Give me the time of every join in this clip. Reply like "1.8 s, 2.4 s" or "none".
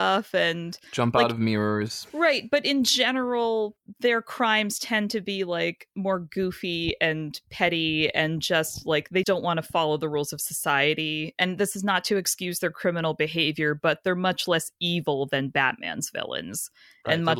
2.1 s, 9.2 s

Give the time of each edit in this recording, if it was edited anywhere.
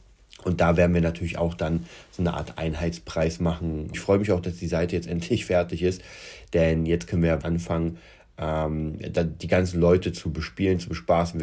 3.9 s, 7.4 s

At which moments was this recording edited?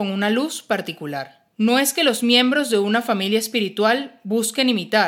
1.5 s

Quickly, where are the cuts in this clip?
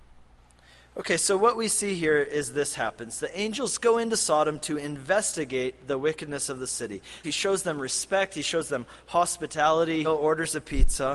7.2 s, 10.0 s

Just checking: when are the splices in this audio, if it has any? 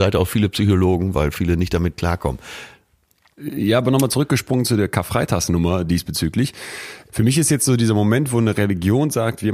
none

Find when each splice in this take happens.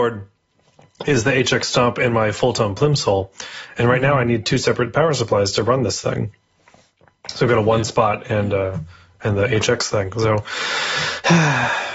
none

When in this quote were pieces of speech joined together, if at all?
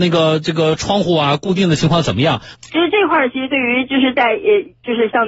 2.5 s

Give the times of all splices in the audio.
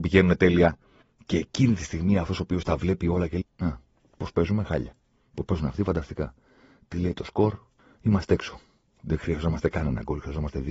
3.4 s

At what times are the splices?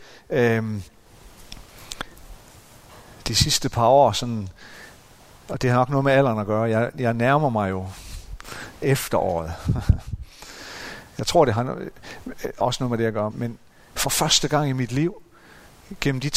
13.3 s

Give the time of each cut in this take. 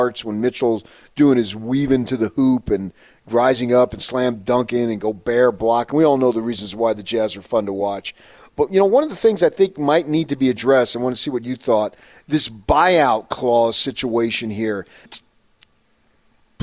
15.1 s

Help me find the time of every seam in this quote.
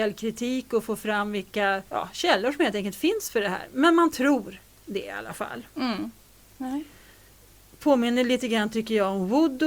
1.9 s, 6.4 s

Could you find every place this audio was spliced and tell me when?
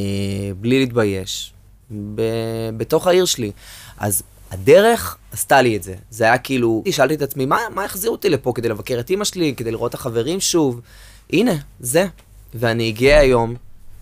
6.8 s

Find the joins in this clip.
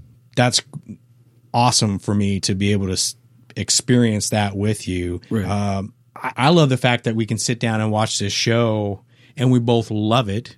2.4 s, 5.3 s, 6.3 s

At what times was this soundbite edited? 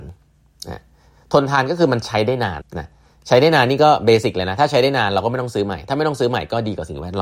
2.6 s

